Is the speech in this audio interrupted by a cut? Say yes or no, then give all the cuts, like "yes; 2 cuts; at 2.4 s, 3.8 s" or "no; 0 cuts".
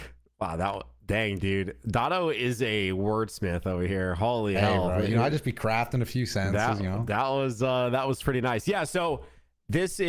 no; 0 cuts